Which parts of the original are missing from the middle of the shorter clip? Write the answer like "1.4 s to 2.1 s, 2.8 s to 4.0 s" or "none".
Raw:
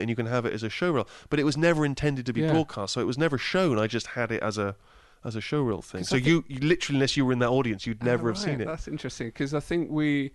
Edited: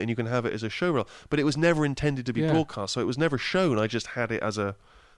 none